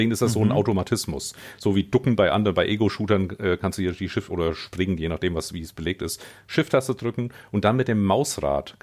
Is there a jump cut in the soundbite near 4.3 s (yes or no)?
yes